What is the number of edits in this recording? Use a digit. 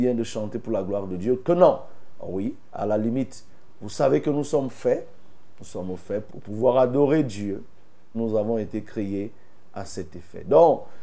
2